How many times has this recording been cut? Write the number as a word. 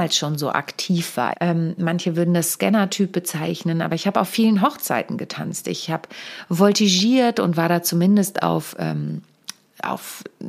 one